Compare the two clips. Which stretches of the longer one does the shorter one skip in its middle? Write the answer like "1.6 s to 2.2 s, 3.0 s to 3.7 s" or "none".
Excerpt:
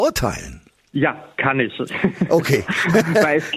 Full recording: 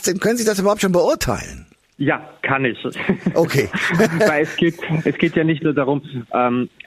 none